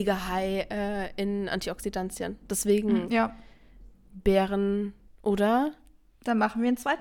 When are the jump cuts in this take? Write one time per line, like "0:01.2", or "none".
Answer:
0:05.1